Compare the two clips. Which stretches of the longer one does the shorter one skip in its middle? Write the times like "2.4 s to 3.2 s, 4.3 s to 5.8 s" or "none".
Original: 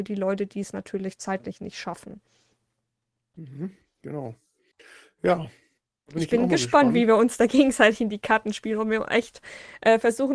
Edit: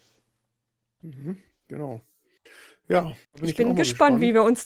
5.6 s to 6.0 s